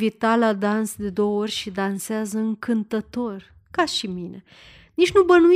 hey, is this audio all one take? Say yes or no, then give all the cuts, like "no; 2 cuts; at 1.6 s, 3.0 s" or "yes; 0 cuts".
yes; 0 cuts